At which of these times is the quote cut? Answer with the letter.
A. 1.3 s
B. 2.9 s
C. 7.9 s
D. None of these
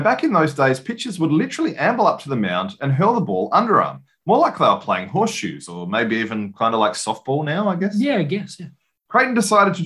D